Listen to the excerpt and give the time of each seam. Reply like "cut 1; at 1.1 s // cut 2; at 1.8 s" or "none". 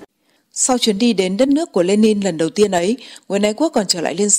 none